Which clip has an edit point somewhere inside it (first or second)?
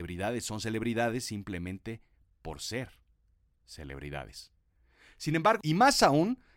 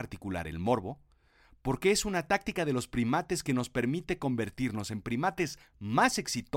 first